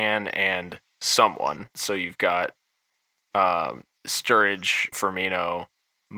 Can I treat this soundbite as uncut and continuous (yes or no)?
no